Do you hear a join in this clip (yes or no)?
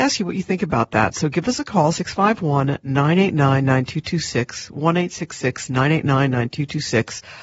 no